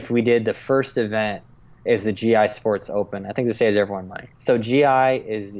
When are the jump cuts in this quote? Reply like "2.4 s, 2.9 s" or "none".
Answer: 4.3 s

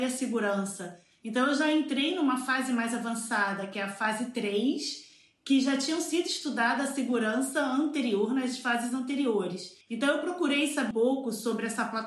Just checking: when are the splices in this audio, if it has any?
9.8 s, 10.9 s

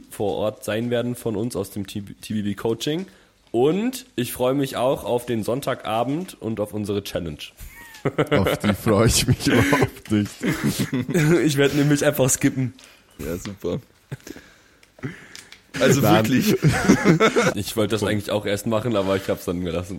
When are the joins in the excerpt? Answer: 13.2 s, 15.7 s, 17.5 s

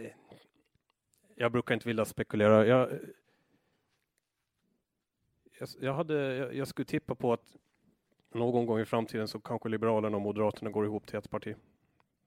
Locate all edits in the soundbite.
none

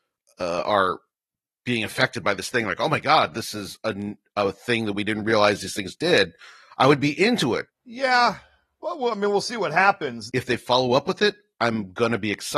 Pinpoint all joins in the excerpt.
7.7 s, 10.3 s

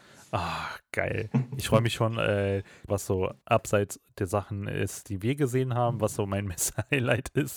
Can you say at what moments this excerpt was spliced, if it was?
2.9 s

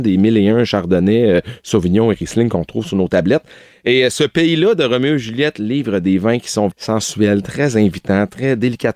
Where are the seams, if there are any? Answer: 6.7 s

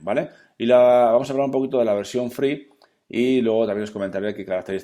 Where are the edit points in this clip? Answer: none

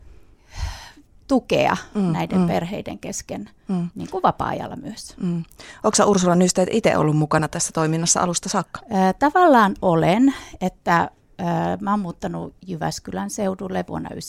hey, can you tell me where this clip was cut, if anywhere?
none

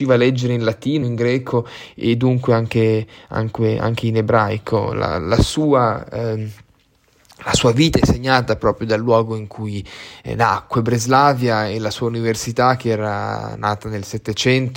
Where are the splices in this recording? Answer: none

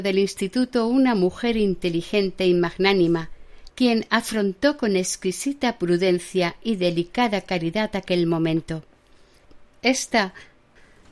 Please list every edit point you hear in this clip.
3.7 s

